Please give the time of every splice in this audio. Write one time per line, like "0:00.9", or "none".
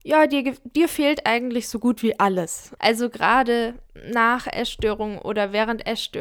0:02.8
0:03.9